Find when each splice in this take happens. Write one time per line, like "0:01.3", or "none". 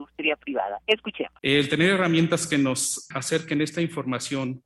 0:01.4